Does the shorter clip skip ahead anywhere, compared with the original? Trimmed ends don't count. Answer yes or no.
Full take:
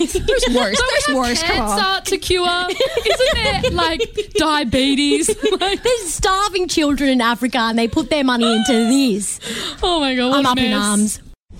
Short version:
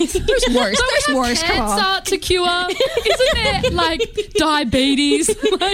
no